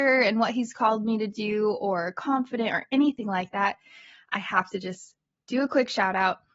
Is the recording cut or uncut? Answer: uncut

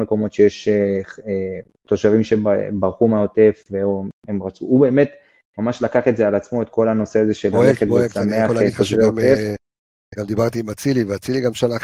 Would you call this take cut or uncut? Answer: uncut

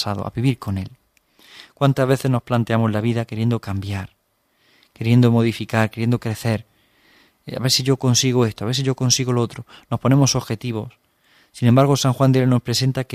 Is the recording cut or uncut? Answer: uncut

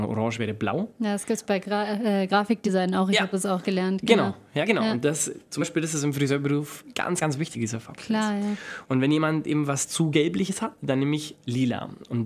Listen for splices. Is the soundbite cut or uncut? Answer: uncut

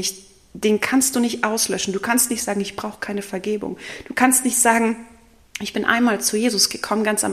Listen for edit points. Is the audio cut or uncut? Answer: uncut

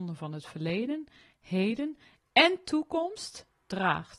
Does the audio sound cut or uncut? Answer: uncut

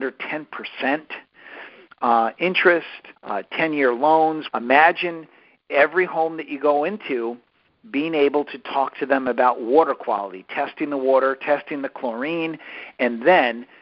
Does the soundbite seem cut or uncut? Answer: cut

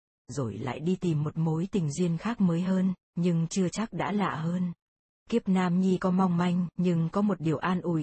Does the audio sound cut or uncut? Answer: cut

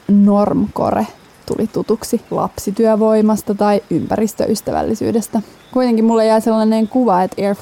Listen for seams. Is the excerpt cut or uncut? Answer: cut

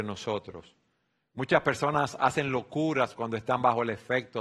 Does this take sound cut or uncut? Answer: uncut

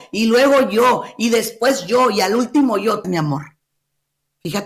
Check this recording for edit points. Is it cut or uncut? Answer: cut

